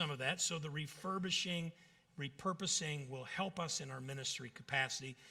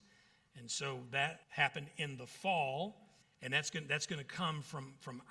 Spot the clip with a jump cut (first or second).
second